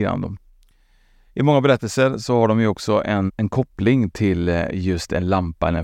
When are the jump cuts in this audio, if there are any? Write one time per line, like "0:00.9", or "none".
0:03.3